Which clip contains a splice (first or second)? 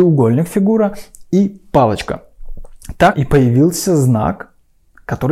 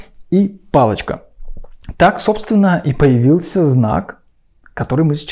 first